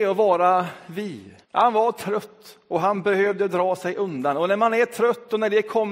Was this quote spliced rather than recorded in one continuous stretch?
yes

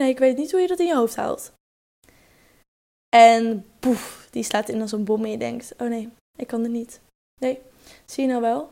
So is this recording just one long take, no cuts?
yes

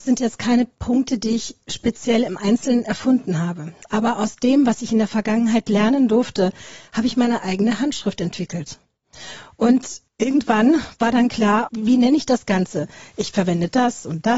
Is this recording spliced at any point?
yes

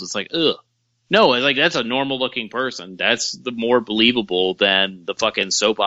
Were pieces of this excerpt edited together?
no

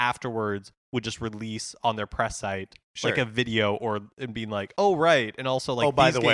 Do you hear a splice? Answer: no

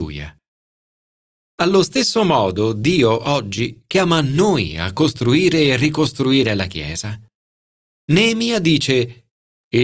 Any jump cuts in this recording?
yes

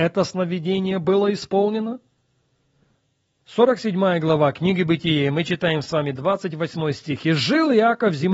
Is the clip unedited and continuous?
yes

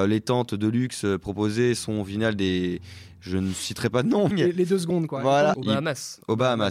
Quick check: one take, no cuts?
no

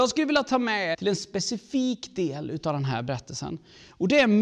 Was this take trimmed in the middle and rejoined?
yes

